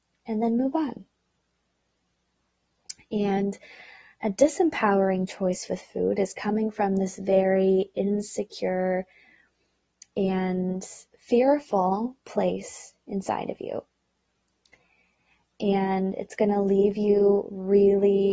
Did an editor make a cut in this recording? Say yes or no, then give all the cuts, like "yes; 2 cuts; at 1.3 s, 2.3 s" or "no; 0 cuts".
yes; 1 cut; at 11.1 s